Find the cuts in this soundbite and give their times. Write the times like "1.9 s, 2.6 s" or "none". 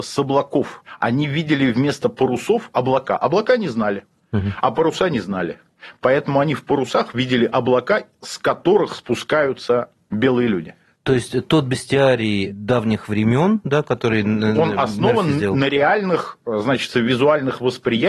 none